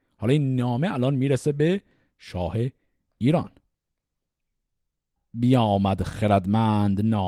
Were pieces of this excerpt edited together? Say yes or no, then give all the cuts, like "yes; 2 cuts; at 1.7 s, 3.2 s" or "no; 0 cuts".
no; 0 cuts